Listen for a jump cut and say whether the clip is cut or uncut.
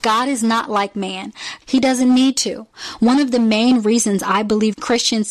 cut